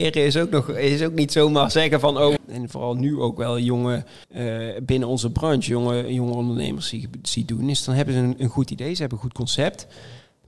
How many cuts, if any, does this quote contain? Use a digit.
2